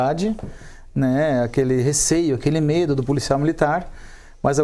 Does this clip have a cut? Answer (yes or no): no